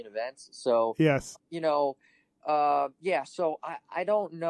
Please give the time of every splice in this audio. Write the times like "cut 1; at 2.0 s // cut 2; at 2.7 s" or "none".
cut 1; at 1.3 s